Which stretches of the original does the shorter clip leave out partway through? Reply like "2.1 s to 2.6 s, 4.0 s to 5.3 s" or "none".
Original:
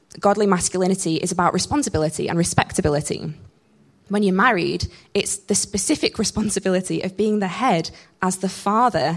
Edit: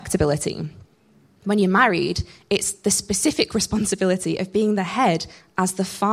none